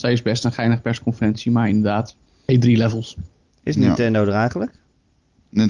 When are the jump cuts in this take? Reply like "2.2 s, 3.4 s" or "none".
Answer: 2.5 s